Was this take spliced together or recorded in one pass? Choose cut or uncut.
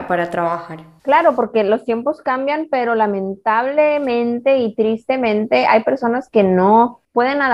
uncut